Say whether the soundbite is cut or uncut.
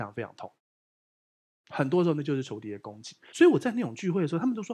cut